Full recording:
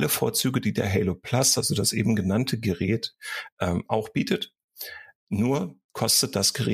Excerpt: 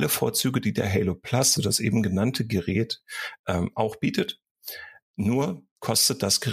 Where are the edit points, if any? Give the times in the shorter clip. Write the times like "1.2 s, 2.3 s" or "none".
1.6 s